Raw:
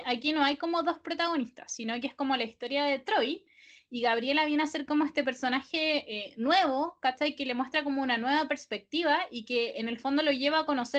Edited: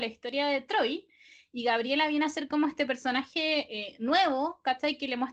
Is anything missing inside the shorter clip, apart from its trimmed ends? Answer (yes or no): no